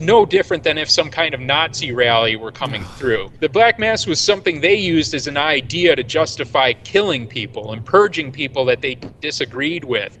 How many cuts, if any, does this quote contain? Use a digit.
1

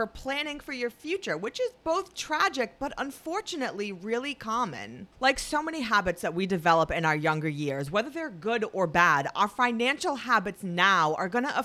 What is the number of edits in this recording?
1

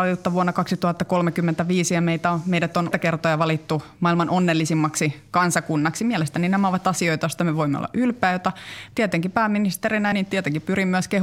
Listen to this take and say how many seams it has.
3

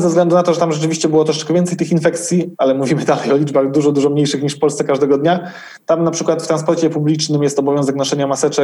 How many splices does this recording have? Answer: 0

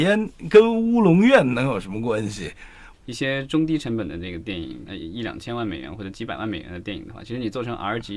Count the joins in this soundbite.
2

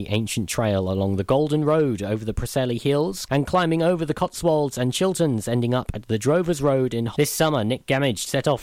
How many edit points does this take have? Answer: 2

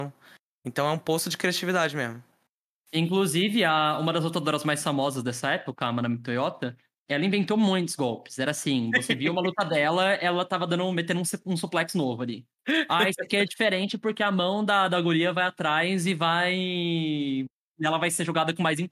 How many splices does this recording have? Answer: 0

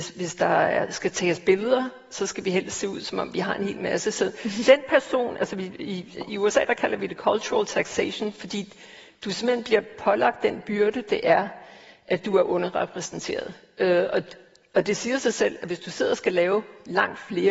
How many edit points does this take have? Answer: 0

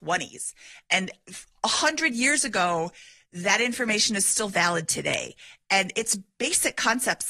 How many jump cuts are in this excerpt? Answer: 0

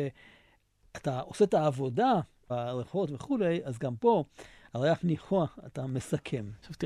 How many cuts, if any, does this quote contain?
1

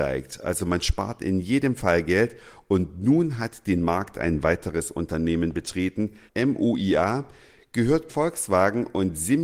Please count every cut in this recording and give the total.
2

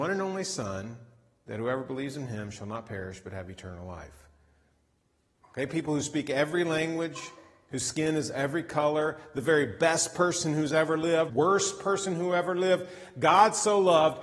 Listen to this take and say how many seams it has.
2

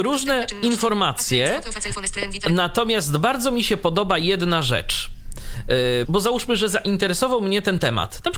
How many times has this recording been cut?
1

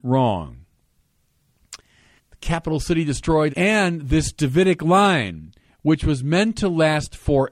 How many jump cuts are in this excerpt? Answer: 2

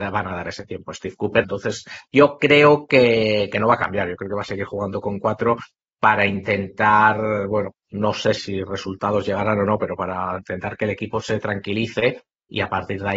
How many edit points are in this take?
2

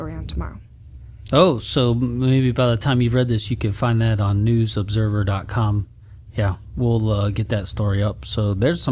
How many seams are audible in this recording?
0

